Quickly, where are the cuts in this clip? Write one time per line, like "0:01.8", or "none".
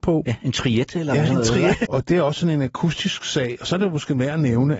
0:01.9